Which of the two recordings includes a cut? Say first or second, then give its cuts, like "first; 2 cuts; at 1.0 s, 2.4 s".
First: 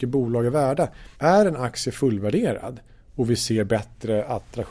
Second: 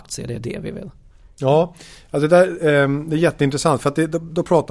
first; 1 cut; at 1.1 s